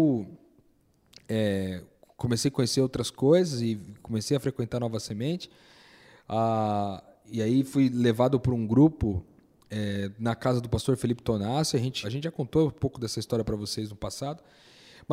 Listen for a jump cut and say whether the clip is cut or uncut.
cut